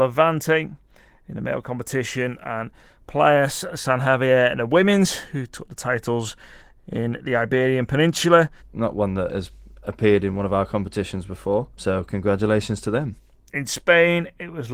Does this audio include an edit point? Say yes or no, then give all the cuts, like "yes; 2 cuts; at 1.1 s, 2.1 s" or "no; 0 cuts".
yes; 1 cut; at 8.6 s